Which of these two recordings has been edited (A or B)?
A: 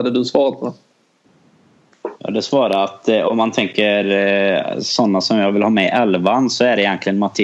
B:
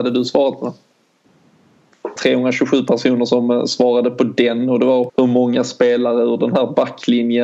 B